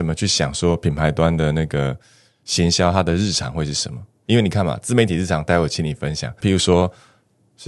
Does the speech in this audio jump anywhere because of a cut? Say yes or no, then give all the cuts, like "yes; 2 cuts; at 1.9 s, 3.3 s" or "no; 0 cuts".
yes; 1 cut; at 6.4 s